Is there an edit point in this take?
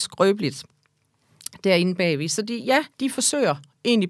yes; 1 cut; at 2.9 s

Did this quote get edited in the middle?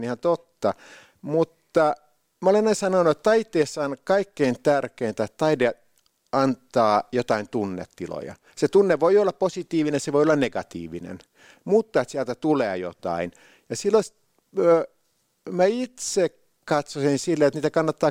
no; 0 cuts

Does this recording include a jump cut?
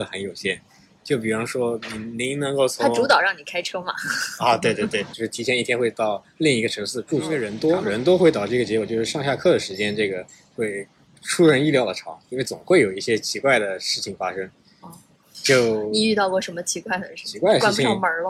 yes; 1 cut; at 5.1 s

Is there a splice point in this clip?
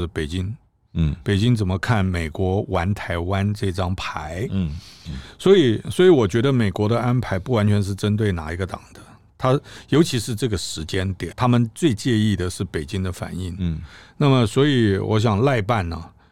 yes; 1 cut; at 11.3 s

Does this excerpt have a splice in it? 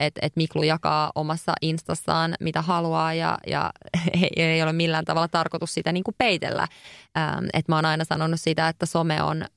no; 0 cuts

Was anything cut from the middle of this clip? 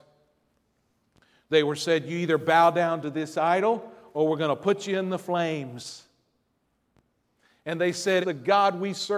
yes; 1 cut; at 8.2 s

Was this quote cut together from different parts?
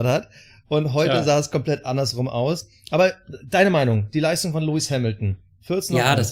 no; 0 cuts

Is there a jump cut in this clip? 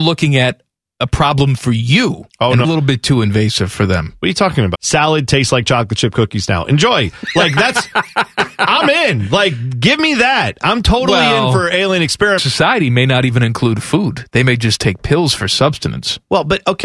yes; 3 cuts; at 2.6 s, 4.7 s, 12.4 s

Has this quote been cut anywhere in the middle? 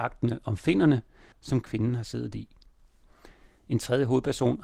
yes; 1 cut; at 1.3 s

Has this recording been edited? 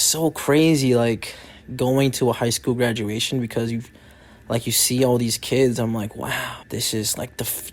yes; 1 cut; at 6.6 s

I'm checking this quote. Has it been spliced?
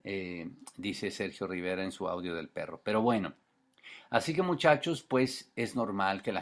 no; 0 cuts

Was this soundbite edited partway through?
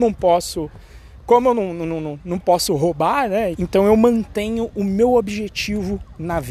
yes; 1 cut; at 3.5 s

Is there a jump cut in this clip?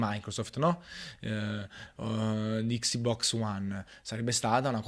no; 0 cuts

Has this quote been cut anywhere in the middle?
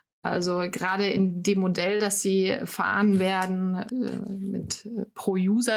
yes; 1 cut; at 3.9 s

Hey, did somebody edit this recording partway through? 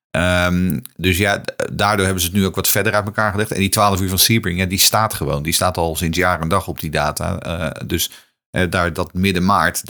no; 0 cuts

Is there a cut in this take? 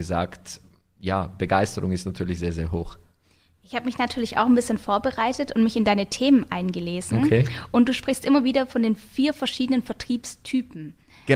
no; 0 cuts

